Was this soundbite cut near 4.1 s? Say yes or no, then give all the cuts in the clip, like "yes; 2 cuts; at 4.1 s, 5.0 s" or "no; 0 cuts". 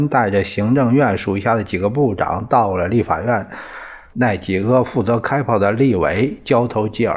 yes; 1 cut; at 4.1 s